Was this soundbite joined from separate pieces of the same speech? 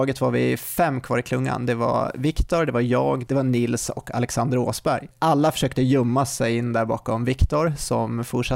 yes; 2 cuts; at 3.3 s, 5.1 s

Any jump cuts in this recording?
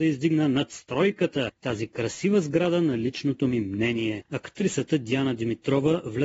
yes; 1 cut; at 4.3 s

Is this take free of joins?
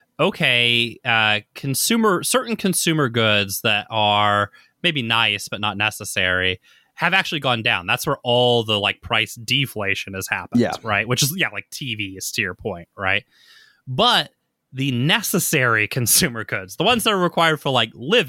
yes; 0 cuts

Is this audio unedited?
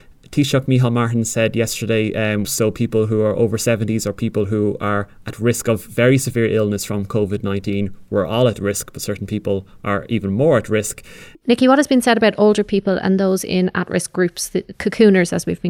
no; 2 cuts; at 2.4 s, 11.4 s

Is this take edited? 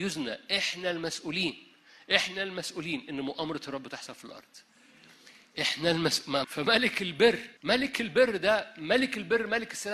yes; 2 cuts; at 6.4 s, 7.6 s

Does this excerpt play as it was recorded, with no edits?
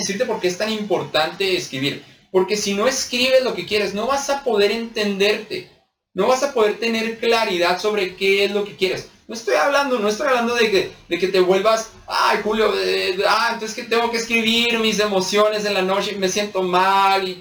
yes; 0 cuts

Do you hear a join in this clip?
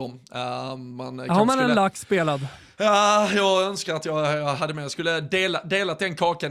no; 0 cuts

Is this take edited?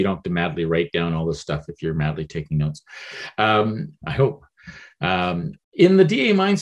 yes; 2 cuts; at 4.0 s, 5.5 s

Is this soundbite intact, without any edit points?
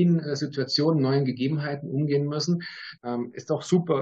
no; 1 cut; at 3.0 s

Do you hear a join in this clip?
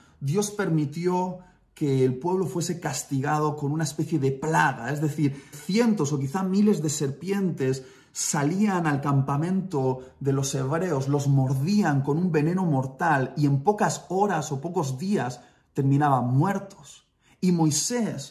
yes; 1 cut; at 5.5 s

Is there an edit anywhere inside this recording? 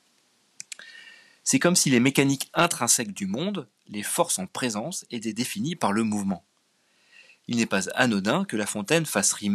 no; 0 cuts

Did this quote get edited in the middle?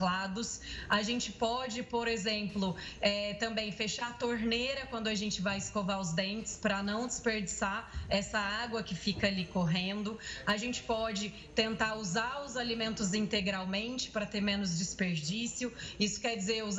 no; 0 cuts

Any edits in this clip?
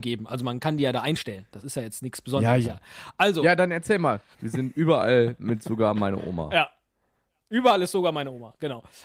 yes; 2 cuts; at 2.6 s, 4.3 s

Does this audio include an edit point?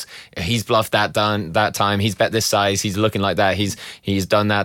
no; 0 cuts

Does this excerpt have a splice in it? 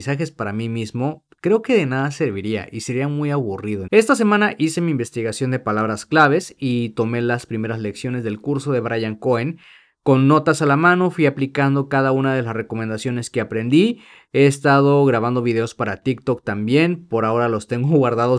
yes; 1 cut; at 3.9 s

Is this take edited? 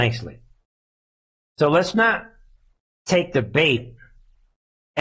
no; 0 cuts

